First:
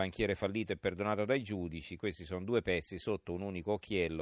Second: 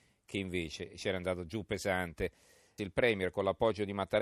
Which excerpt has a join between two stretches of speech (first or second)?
second